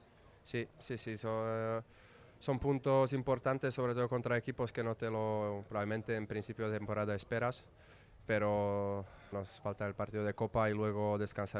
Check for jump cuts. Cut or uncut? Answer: cut